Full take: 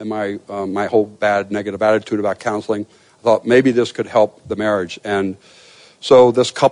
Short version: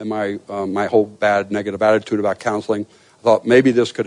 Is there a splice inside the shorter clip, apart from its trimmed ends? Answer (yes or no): no